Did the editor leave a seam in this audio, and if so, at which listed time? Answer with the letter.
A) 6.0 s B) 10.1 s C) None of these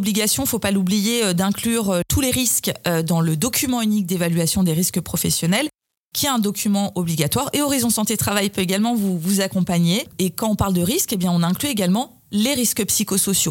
C